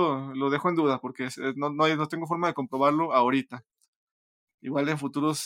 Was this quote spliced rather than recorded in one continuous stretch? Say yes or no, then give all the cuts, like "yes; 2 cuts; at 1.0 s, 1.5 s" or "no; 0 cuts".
no; 0 cuts